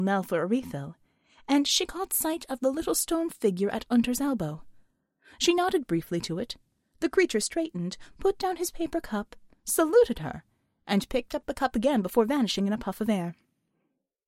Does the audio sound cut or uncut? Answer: uncut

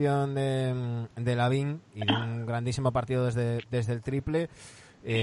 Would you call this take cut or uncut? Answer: cut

